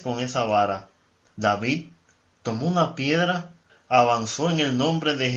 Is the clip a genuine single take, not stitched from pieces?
no; 1 cut; at 3.7 s

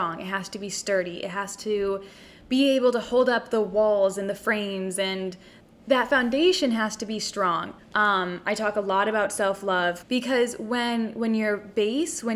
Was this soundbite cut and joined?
yes; 2 cuts; at 7.8 s, 10.0 s

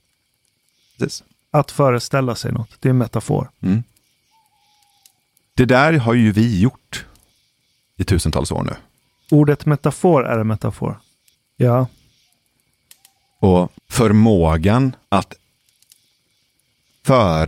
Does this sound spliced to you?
yes; 3 cuts; at 11.3 s, 13.8 s, 15.0 s

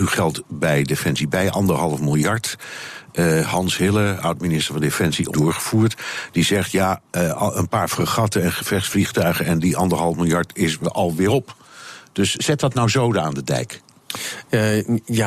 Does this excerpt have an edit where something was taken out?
yes; 1 cut; at 5.3 s

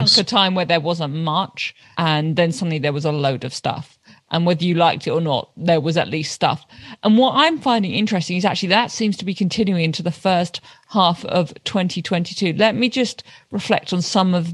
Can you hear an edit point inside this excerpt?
yes; 1 cut; at 1.9 s

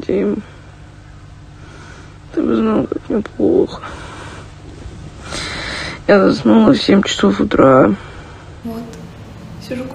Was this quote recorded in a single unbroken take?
no; 1 cut; at 8.6 s

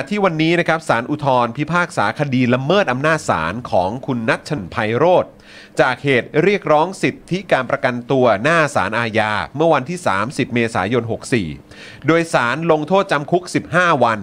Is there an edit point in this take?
yes; 1 cut; at 4.6 s

